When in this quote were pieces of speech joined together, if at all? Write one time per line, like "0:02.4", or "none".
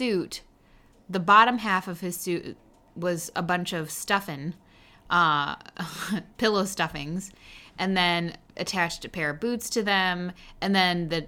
none